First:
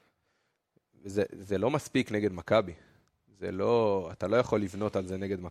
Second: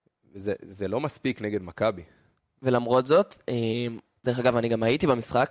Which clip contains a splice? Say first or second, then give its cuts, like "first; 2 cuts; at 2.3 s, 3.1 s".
second; 1 cut; at 2.6 s